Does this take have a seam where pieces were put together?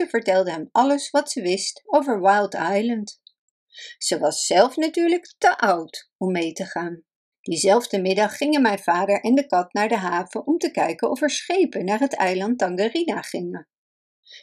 yes; 1 cut; at 7.3 s

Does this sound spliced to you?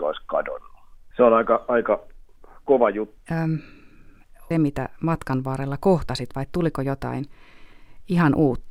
yes; 3 cuts; at 1.1 s, 3.2 s, 4.5 s

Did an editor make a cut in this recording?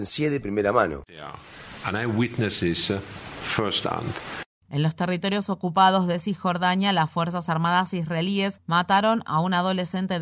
no; 0 cuts

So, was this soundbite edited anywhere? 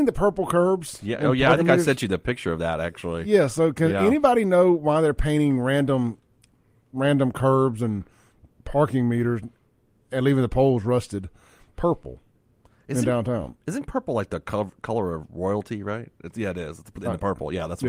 no; 0 cuts

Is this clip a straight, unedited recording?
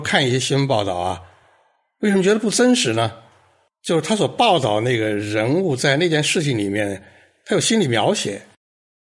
yes; 0 cuts

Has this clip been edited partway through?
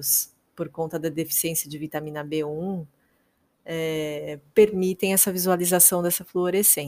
no; 0 cuts

